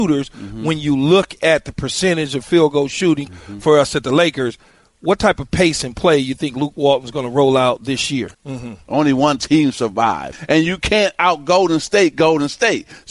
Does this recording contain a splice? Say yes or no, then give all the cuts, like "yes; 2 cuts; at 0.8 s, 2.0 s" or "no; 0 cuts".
yes; 3 cuts; at 3.3 s, 8.3 s, 10.3 s